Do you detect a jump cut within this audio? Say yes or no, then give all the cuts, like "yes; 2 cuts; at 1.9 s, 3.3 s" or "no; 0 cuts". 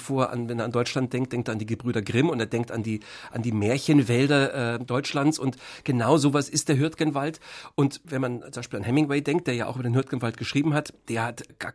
no; 0 cuts